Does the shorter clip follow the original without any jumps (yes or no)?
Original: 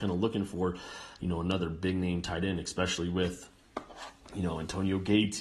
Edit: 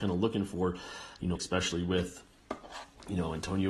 no